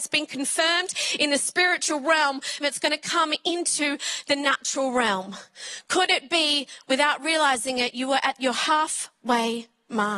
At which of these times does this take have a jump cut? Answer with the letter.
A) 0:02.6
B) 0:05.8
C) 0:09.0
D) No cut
A